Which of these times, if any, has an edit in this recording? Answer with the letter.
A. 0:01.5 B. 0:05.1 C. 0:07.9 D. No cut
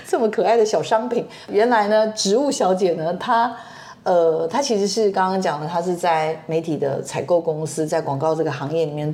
D